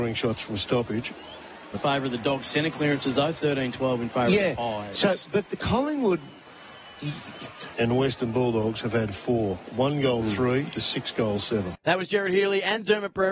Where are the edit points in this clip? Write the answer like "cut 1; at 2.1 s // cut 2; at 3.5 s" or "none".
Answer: cut 1; at 1.7 s // cut 2; at 7.7 s